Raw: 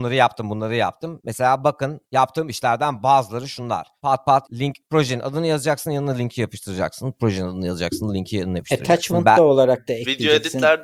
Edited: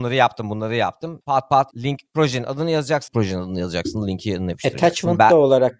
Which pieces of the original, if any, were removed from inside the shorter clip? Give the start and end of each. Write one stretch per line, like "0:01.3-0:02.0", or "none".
0:01.2-0:04.0
0:05.8-0:07.1